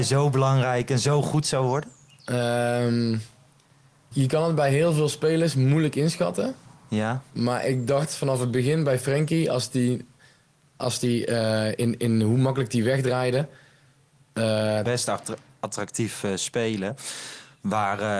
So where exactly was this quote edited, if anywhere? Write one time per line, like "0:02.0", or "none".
0:04.1
0:14.8